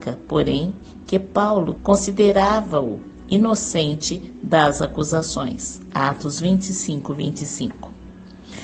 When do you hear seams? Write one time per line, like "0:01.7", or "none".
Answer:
0:01.7